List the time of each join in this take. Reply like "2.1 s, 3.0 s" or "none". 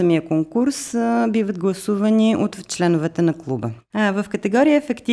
3.9 s

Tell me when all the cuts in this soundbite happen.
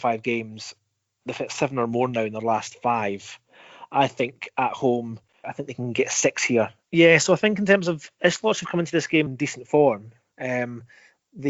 5.4 s, 6.8 s, 9.3 s

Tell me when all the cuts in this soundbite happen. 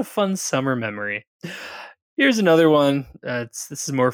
none

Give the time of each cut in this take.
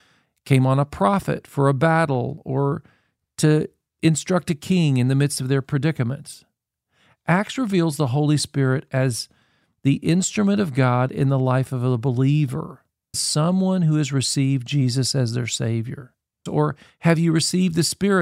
13.1 s, 16.5 s

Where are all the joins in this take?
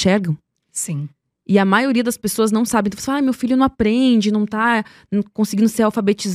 none

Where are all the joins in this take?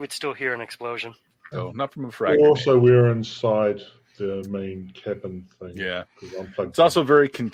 1.5 s

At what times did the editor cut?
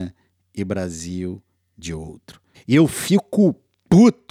2.5 s

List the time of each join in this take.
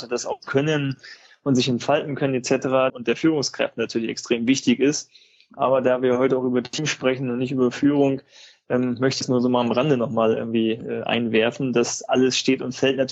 2.9 s

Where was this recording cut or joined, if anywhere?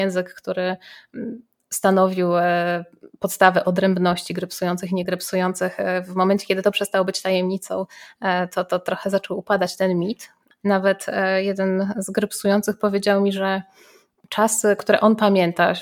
10.6 s

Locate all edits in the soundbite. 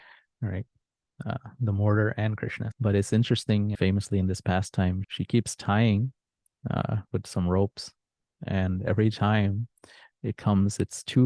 2.7 s, 3.7 s, 5.0 s

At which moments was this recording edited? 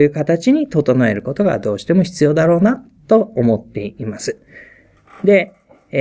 none

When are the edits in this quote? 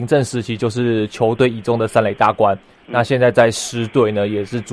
none

